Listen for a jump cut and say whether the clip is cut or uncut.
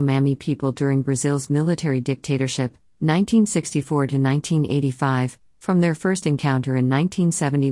uncut